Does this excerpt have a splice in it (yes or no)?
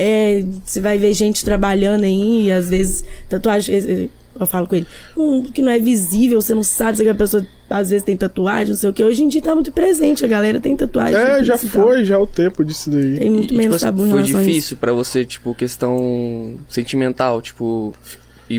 no